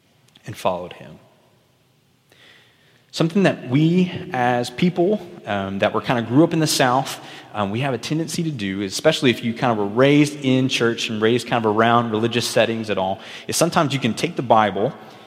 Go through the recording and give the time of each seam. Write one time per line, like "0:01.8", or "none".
none